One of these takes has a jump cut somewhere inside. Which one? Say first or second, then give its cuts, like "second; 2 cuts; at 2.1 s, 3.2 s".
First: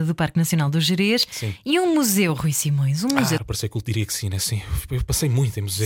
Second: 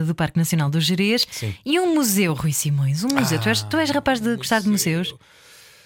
first; 1 cut; at 3.4 s